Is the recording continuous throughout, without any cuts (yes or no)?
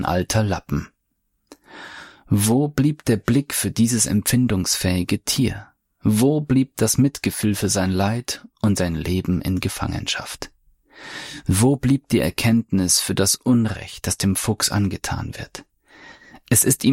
yes